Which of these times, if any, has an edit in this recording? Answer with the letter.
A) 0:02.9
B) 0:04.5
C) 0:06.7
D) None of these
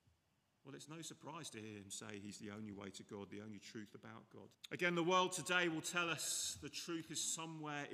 B